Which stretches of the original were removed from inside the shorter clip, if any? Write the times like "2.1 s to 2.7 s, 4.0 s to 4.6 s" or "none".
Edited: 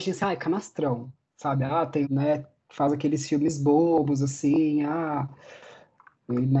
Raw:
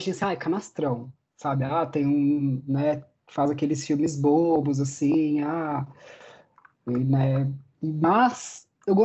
2.0 s to 2.6 s